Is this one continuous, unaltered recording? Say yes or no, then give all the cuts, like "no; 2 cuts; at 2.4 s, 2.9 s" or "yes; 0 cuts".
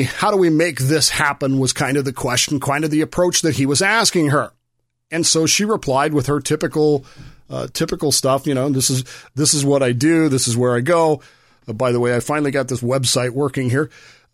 yes; 0 cuts